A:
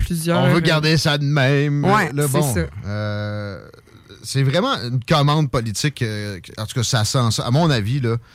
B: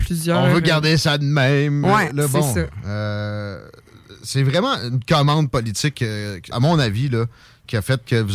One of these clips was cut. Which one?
B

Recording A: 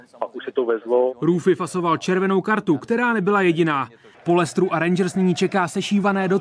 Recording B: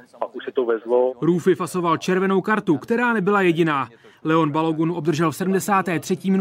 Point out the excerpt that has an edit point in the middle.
A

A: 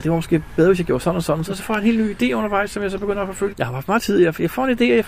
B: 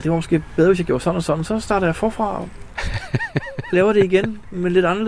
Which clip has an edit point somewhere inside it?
A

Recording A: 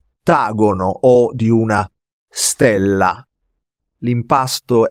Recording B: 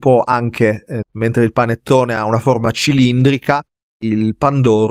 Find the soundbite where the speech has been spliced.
B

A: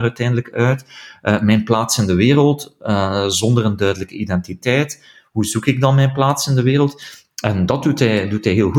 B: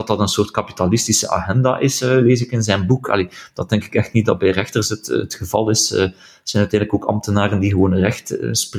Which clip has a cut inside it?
A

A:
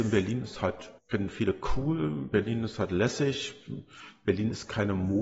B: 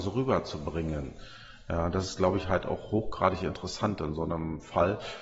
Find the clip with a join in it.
A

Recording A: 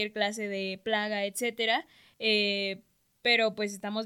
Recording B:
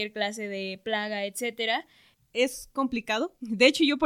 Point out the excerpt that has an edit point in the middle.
B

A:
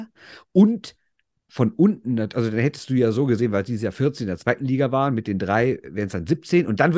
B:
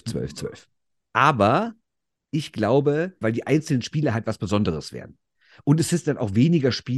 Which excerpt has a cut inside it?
B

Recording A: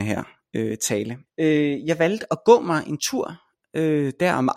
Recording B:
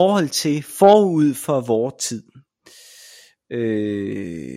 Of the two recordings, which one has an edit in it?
A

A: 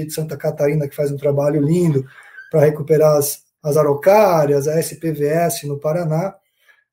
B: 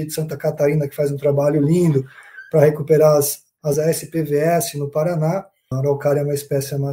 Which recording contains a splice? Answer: B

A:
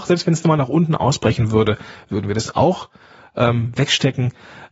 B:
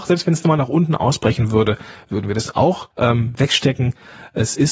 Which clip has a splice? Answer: B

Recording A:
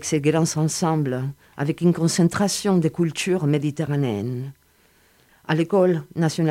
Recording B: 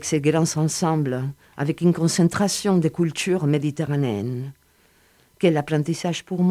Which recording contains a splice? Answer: A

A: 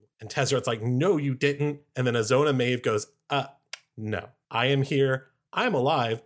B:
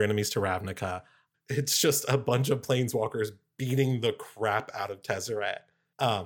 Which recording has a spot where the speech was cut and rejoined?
B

